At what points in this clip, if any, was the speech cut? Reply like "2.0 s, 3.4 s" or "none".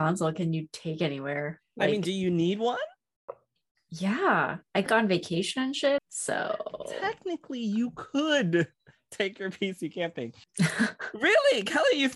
4.9 s, 6.0 s, 10.4 s